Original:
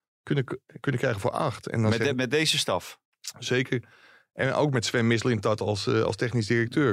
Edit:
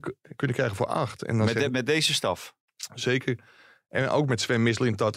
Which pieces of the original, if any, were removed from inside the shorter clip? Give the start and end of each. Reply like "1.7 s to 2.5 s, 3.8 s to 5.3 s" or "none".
none